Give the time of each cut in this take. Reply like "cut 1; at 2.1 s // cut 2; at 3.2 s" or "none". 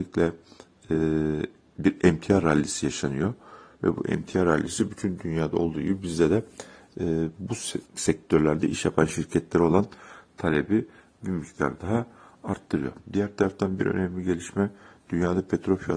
cut 1; at 7.9 s